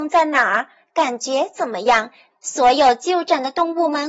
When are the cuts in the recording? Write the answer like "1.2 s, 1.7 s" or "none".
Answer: 2.3 s